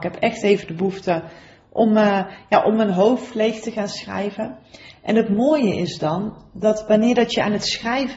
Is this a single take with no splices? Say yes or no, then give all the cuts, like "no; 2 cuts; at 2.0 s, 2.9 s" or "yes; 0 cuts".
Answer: yes; 0 cuts